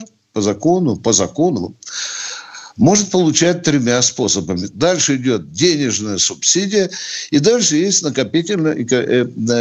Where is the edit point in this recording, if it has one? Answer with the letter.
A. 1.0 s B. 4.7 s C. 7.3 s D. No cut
B